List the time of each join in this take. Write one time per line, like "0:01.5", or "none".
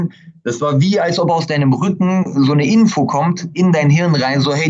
none